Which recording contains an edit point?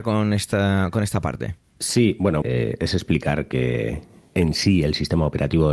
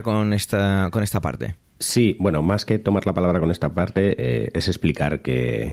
first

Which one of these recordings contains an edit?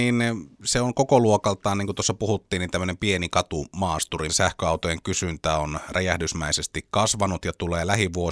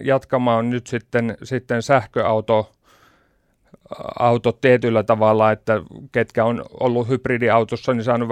first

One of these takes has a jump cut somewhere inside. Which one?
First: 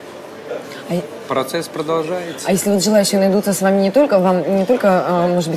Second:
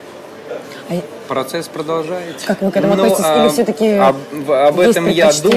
second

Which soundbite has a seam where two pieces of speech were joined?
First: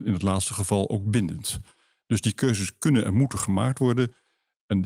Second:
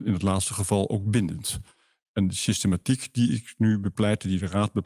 second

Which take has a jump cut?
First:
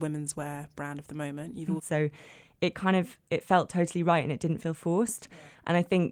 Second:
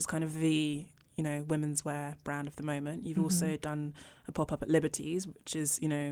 first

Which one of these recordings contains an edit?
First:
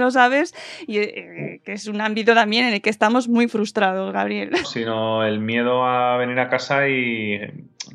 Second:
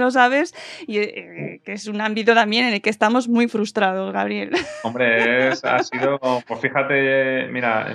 first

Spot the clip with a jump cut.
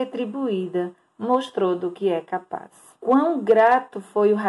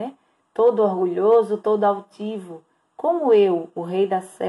first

